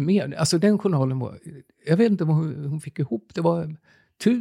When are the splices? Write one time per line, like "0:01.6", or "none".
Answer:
none

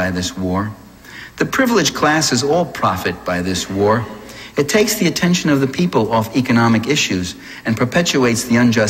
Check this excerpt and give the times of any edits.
none

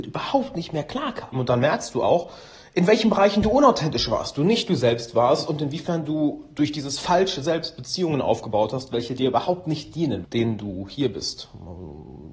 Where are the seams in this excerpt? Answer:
0:01.3
0:10.2

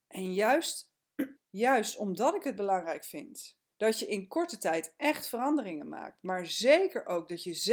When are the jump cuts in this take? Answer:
0:01.4
0:03.7

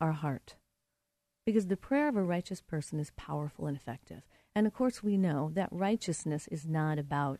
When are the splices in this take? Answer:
0:01.3

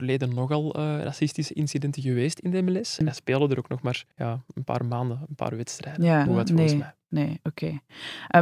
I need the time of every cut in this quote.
0:03.0
0:04.1
0:06.3

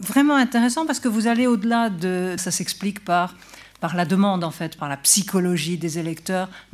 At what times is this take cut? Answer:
0:02.4
0:04.8

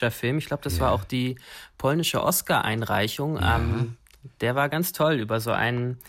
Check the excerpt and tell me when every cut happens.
none

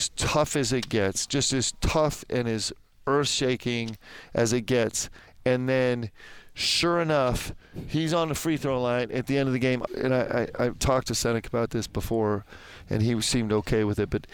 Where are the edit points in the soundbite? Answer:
0:09.9

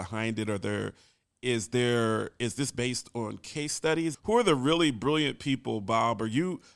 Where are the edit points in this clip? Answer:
0:04.1

